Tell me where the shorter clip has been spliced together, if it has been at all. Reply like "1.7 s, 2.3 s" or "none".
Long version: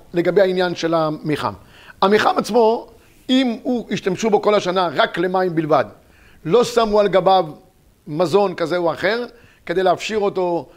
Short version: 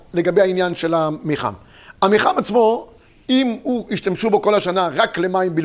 none